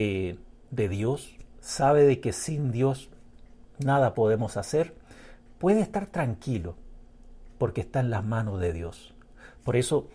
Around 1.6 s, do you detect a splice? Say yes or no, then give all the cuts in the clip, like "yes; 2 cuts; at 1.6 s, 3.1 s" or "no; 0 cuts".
yes; 1 cut; at 1.6 s